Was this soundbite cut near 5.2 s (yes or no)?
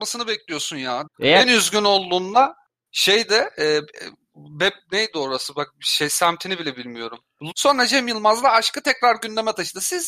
no